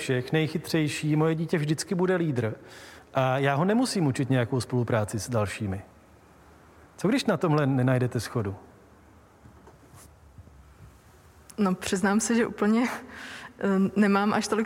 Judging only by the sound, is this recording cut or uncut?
uncut